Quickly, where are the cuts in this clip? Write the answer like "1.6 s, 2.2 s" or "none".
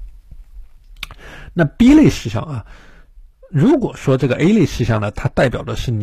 none